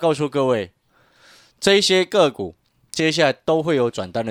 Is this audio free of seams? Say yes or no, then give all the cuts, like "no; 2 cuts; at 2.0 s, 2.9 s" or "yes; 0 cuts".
yes; 0 cuts